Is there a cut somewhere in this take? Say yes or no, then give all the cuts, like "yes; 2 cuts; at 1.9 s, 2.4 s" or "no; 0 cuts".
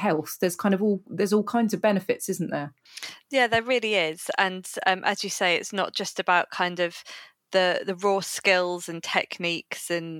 no; 0 cuts